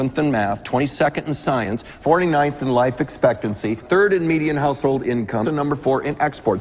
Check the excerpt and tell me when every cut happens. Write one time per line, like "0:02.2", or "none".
0:03.8
0:05.4